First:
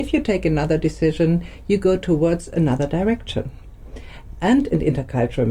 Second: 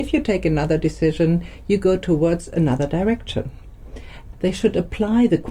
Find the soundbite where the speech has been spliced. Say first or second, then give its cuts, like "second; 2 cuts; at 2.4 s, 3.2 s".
second; 1 cut; at 4.3 s